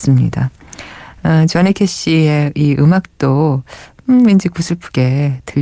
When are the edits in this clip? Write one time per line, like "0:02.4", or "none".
none